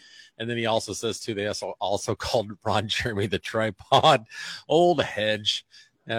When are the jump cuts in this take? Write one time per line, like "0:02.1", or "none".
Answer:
none